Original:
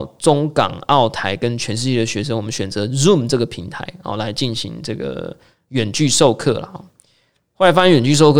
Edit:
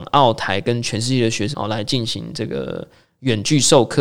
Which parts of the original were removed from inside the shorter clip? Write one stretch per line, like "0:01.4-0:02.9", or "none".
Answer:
0:02.3-0:04.0